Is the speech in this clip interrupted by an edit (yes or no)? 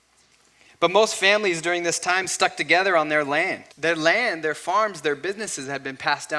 yes